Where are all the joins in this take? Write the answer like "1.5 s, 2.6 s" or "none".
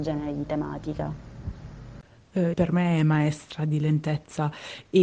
2.5 s

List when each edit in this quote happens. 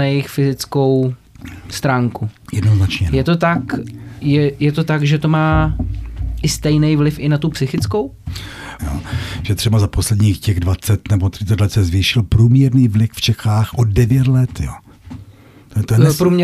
8.8 s

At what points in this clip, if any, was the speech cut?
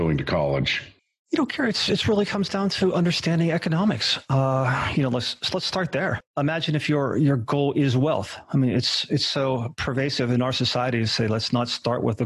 none

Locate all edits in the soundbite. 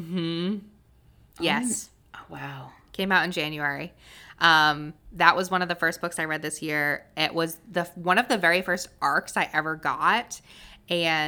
none

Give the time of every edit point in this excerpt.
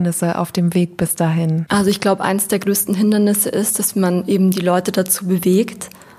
none

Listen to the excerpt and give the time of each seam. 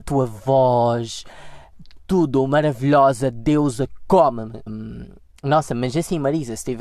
4.7 s

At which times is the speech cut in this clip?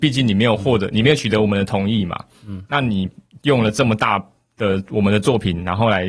none

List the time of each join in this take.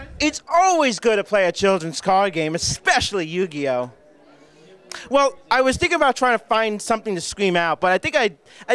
none

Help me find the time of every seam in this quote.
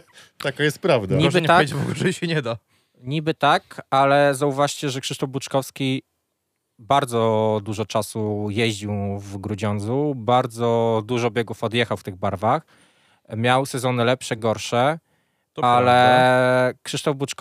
none

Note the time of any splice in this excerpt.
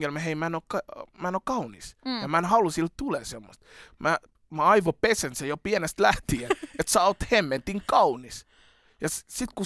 none

